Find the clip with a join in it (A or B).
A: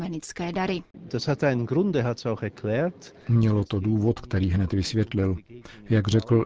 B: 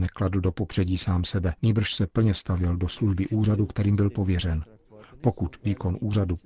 B